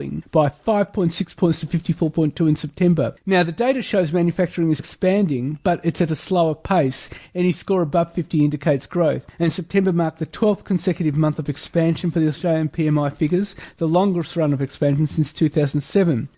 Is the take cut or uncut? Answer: cut